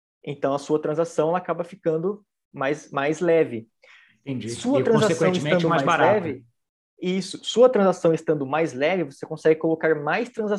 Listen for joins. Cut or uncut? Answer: uncut